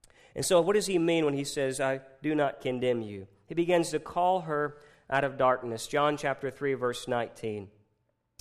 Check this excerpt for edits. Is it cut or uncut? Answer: uncut